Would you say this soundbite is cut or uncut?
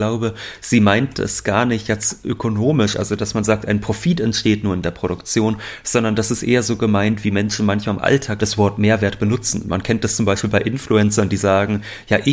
cut